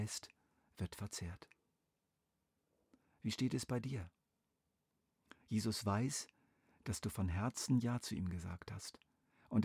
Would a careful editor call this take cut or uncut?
uncut